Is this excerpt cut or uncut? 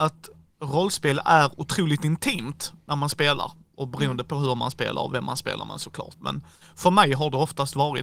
uncut